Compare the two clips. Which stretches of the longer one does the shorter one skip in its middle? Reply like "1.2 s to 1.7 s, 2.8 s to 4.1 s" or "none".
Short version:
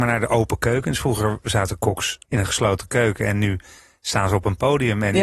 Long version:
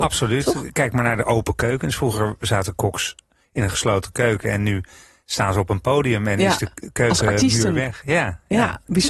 3.2 s to 3.5 s

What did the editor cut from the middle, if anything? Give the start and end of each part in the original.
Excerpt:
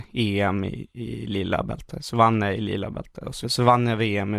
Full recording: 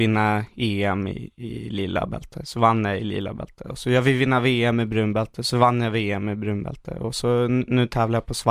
3.8 s to 5.4 s

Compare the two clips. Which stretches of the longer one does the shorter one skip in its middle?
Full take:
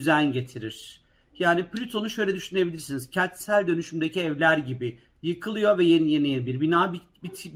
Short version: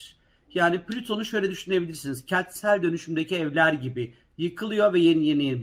none

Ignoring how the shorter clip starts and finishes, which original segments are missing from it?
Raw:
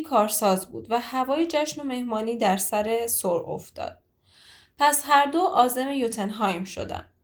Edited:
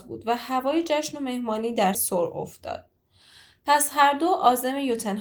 2.6 s to 3.1 s

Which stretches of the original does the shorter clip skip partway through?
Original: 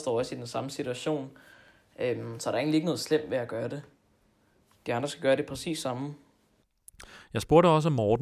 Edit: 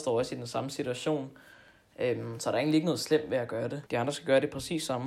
3.9 s to 4.8 s

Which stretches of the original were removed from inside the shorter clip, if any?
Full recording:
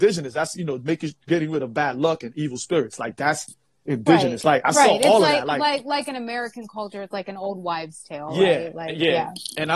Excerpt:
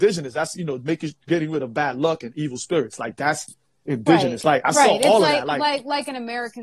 none

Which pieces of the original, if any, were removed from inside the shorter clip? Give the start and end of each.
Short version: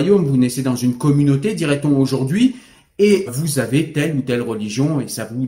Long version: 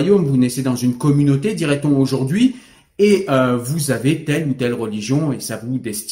3.3 s to 3.6 s

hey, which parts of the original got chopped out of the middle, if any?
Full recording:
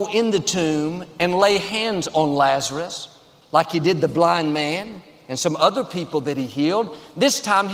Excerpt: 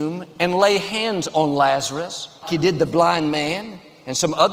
3.2 s to 3.6 s

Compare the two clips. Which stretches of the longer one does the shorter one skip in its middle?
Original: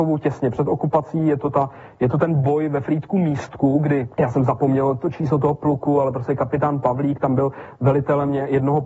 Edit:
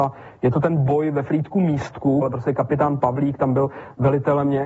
3.8 s to 6.0 s

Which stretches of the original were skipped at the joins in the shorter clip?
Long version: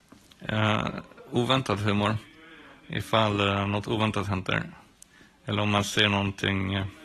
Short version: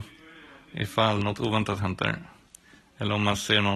3.3 s to 3.7 s

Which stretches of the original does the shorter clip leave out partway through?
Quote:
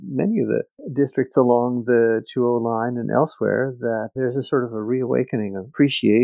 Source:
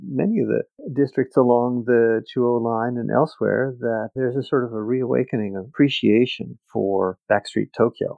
none

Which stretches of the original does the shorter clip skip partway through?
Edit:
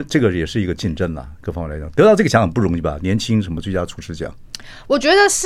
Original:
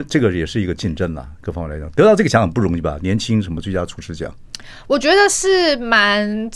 none

